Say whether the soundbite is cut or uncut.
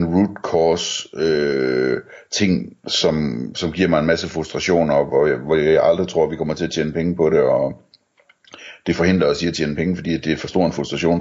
uncut